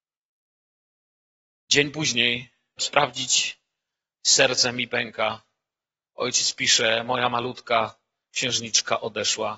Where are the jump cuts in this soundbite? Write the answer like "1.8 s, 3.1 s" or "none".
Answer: 2.8 s

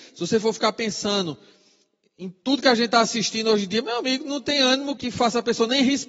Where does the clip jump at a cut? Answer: 5.0 s

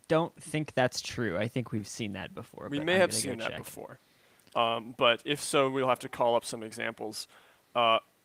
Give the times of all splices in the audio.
none

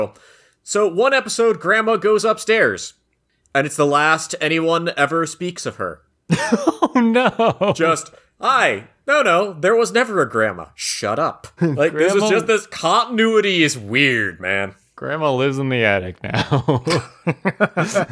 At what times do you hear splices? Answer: 11.6 s

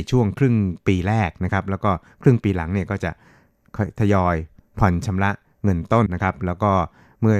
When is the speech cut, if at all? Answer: 6.1 s

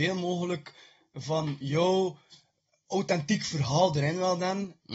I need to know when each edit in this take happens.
none

